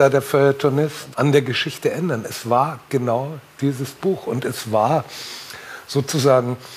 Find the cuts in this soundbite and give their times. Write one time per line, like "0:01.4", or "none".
0:01.1